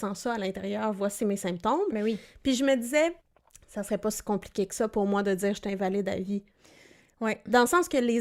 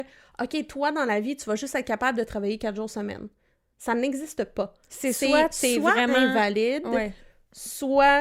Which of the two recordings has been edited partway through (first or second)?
first